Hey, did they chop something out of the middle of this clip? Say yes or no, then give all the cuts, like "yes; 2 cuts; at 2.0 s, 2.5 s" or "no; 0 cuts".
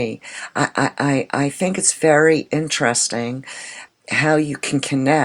yes; 1 cut; at 3.9 s